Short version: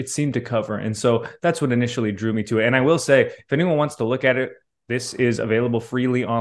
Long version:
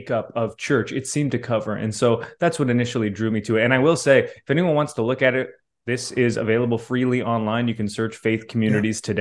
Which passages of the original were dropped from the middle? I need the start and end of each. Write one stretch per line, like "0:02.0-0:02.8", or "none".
none